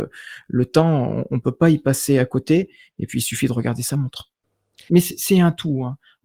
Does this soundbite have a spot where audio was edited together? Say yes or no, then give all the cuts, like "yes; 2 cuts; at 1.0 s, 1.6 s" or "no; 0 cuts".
yes; 1 cut; at 4.9 s